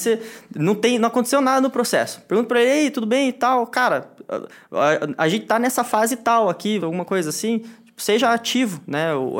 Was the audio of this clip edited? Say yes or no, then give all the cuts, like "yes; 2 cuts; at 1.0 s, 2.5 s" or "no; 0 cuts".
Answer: yes; 1 cut; at 6.8 s